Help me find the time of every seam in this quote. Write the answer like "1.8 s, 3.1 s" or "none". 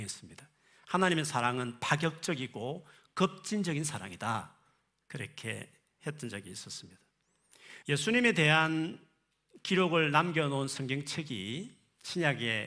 7.8 s